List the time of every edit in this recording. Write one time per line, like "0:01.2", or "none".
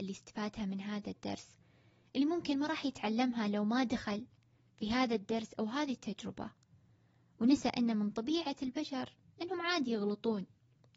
none